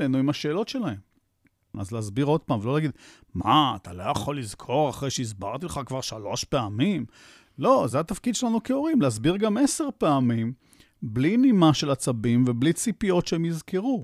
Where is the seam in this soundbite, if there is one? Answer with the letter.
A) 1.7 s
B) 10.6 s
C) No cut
A